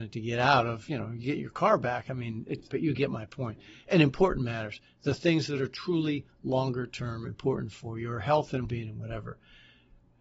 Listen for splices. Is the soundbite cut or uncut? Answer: cut